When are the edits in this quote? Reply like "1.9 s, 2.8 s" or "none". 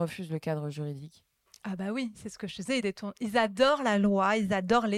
none